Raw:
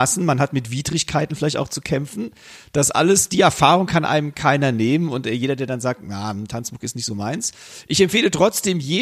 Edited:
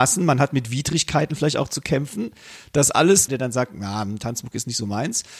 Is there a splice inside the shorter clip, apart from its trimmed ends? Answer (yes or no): yes